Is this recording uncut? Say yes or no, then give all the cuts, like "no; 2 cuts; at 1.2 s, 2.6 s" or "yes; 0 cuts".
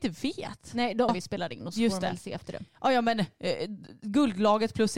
no; 1 cut; at 1.1 s